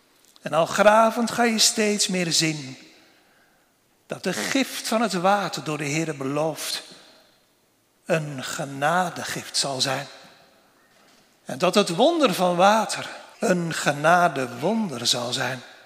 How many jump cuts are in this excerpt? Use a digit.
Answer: 1